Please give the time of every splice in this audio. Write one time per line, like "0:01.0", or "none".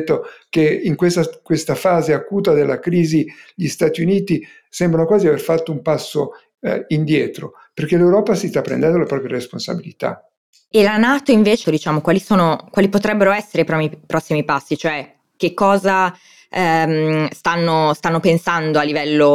0:11.6